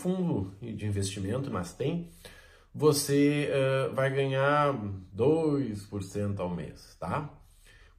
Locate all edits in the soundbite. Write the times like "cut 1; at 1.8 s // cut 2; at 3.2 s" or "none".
cut 1; at 1.5 s

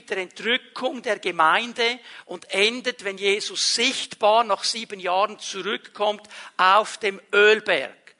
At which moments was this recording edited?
none

